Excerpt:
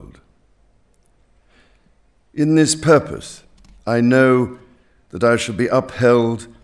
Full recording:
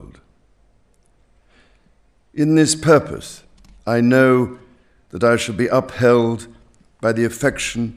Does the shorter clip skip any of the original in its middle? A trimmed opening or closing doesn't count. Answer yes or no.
no